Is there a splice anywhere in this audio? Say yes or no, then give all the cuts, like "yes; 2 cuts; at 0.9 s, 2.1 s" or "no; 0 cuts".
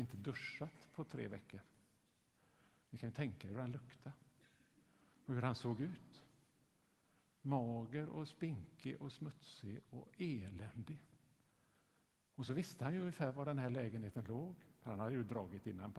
no; 0 cuts